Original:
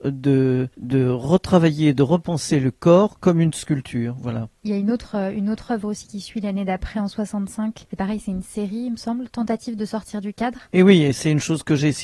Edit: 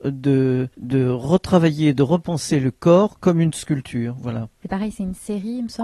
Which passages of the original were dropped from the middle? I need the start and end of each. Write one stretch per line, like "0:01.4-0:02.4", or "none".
0:04.6-0:07.9